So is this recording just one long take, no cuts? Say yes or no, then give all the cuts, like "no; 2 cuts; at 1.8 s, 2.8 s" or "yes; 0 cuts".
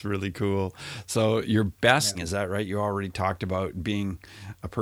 no; 1 cut; at 2.1 s